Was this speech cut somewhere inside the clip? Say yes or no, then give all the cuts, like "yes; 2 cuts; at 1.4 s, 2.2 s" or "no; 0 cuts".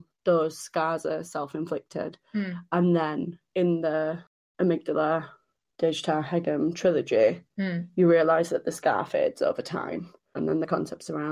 no; 0 cuts